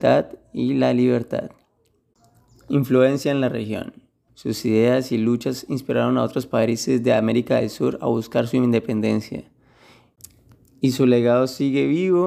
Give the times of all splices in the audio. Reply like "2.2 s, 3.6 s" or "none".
4.3 s